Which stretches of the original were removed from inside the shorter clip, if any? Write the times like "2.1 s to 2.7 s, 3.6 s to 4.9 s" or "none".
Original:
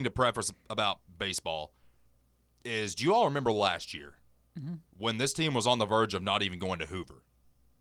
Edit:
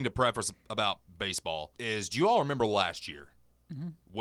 1.8 s to 2.6 s